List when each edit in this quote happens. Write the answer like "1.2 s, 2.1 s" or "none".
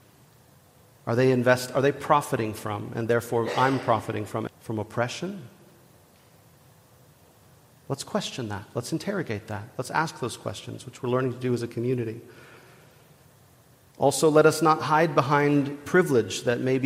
4.5 s